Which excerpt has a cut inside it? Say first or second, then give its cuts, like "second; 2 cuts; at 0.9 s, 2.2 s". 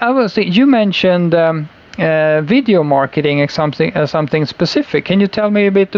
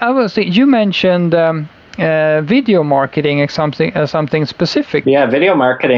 second; 1 cut; at 5.0 s